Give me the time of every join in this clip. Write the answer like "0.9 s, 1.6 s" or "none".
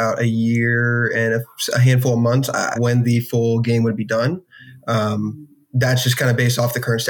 2.7 s

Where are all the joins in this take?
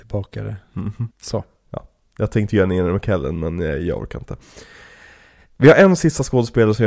1.1 s

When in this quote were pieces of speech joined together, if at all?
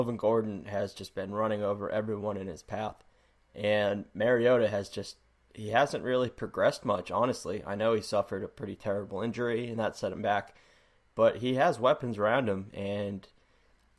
none

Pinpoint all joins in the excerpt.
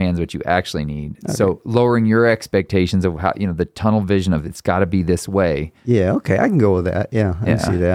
none

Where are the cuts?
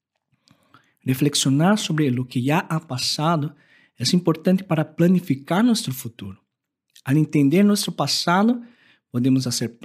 none

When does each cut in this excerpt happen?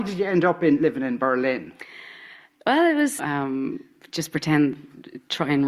3.2 s

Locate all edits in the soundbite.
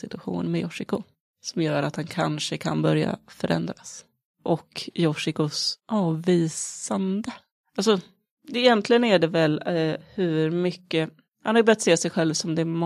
none

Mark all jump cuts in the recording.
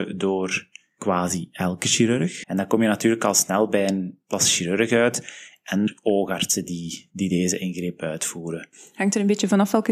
2.4 s

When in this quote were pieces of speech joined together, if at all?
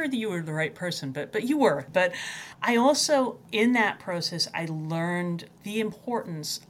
1.9 s

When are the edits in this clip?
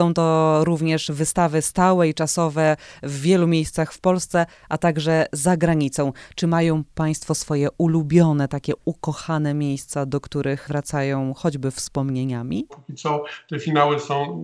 12.7 s

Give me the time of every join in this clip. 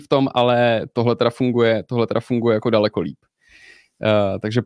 none

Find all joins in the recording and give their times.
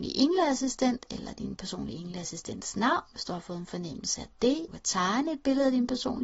4.7 s

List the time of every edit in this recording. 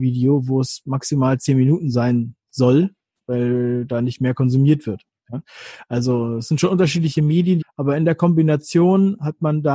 7.6 s

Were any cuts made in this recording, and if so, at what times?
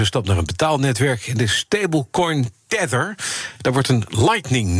none

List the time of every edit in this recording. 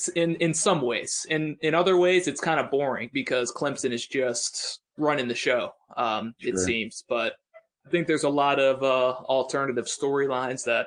4.9 s

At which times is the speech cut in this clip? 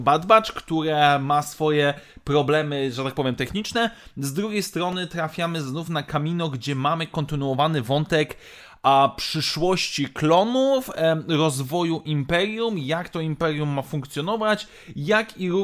none

